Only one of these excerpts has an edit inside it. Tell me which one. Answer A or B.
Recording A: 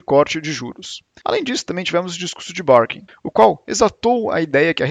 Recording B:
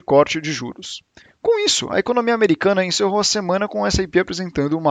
A